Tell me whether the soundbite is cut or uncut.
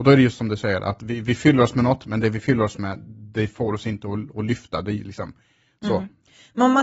uncut